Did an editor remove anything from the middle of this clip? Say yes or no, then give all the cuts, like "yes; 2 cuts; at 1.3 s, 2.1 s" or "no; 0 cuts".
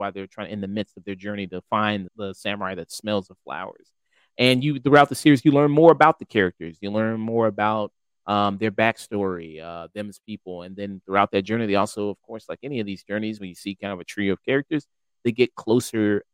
yes; 1 cut; at 2.1 s